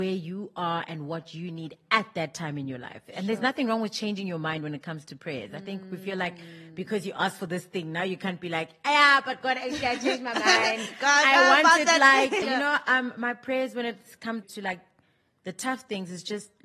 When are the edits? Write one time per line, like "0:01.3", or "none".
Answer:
0:12.4
0:14.4